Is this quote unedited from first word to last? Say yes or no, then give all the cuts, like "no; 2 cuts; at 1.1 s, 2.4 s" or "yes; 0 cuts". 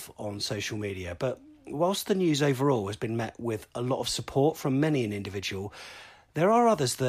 yes; 0 cuts